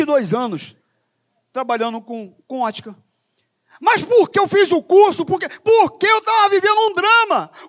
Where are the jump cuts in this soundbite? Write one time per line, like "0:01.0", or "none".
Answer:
0:04.3